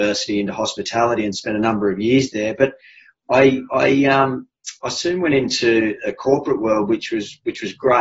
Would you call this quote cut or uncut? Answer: uncut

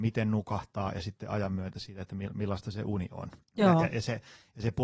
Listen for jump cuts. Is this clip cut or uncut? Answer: uncut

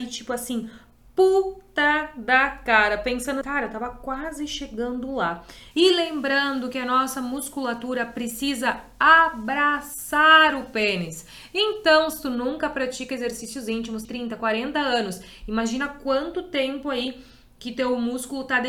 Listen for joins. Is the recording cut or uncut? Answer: cut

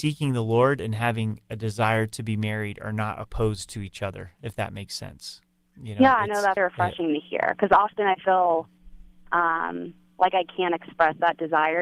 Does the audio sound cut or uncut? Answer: cut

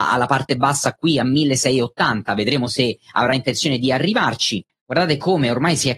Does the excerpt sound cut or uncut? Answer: cut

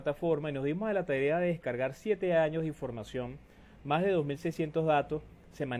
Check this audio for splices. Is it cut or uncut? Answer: uncut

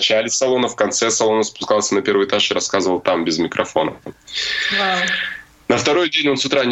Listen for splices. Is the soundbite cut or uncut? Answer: uncut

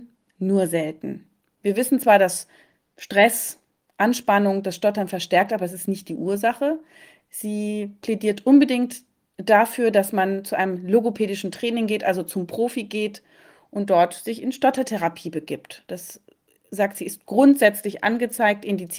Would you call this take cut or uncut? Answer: uncut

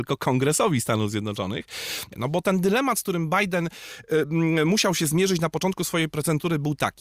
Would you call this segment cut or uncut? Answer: cut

